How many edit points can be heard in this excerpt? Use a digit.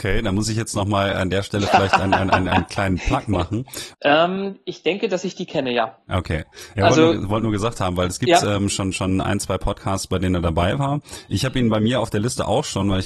1